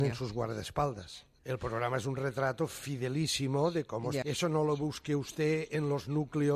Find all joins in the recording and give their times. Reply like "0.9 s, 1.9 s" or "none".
1.4 s, 4.2 s